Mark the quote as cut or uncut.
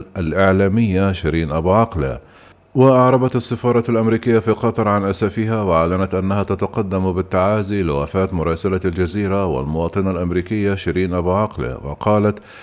uncut